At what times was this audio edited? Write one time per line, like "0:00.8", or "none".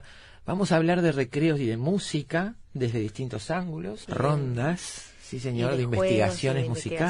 0:04.0